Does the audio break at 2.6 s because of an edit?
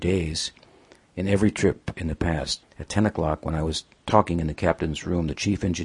yes; 1 cut; at 2.6 s

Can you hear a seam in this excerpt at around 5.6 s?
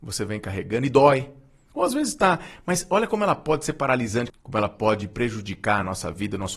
no; 2 cuts; at 1.7 s, 4.3 s

